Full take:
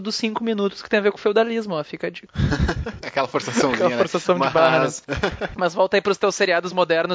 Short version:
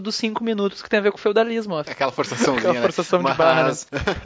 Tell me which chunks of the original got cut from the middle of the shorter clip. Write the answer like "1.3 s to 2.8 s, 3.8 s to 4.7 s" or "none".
1.8 s to 3.0 s